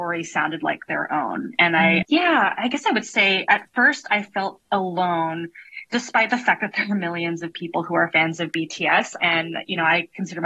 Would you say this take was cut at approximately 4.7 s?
yes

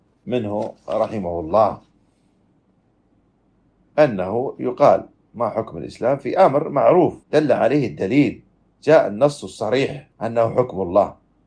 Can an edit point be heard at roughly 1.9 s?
no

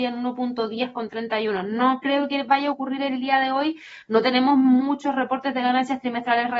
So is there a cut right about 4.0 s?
no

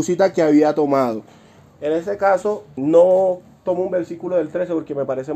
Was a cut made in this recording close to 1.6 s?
no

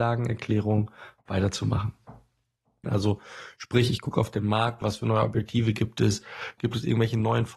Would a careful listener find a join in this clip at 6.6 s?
yes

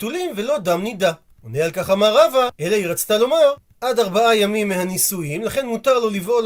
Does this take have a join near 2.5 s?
yes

